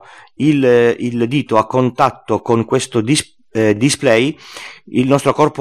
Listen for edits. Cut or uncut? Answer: uncut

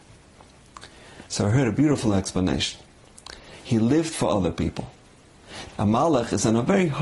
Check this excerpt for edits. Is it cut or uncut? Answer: cut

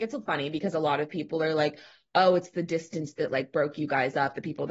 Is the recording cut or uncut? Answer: uncut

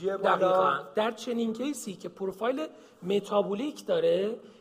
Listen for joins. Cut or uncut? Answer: cut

